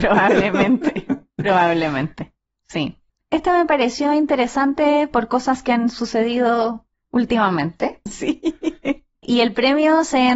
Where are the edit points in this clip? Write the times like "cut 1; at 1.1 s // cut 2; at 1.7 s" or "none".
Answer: cut 1; at 3.2 s // cut 2; at 8.1 s